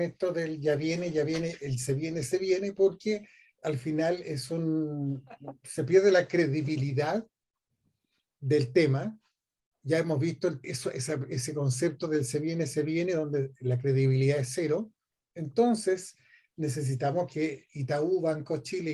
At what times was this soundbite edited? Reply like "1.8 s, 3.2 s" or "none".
10.6 s

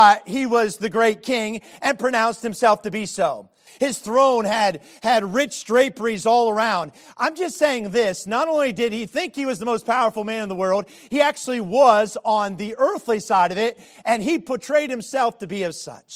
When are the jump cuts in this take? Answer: 3.7 s

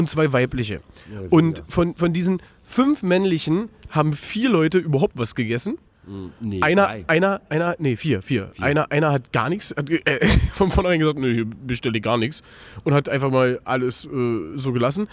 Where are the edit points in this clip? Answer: none

